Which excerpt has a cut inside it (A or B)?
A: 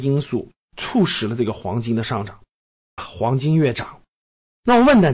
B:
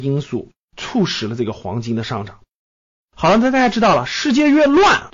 A